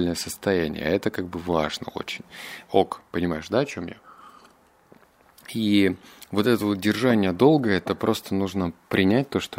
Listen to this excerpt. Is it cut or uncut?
cut